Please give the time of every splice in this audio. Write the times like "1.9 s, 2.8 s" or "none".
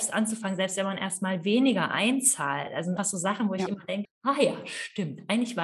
3.0 s, 4.0 s